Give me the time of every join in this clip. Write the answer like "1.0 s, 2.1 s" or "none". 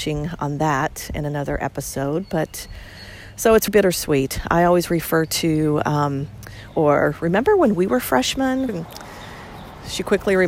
3.7 s, 6.7 s, 8.7 s